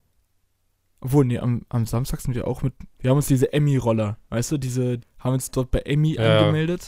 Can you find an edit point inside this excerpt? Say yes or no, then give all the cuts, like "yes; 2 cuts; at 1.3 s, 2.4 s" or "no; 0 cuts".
yes; 2 cuts; at 3.0 s, 5.0 s